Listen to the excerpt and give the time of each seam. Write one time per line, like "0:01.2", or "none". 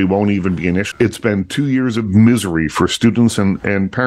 0:00.9